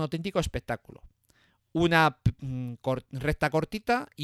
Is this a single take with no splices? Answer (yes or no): yes